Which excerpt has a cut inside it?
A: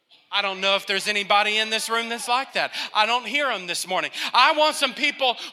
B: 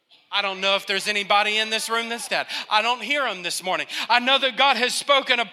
B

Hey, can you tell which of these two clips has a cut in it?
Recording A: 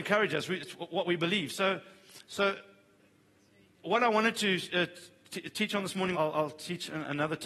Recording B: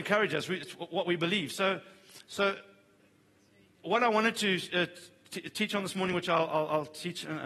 A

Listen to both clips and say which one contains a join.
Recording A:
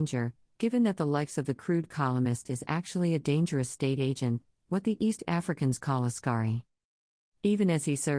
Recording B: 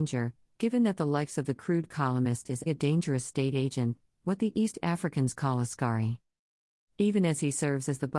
B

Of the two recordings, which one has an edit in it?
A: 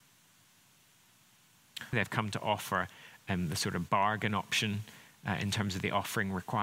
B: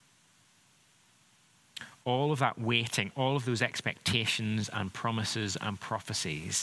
A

